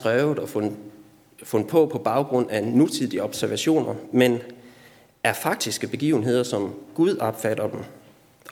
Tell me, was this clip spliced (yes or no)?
no